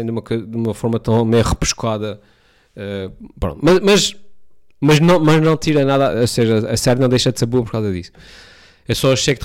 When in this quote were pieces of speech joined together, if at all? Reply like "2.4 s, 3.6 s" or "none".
none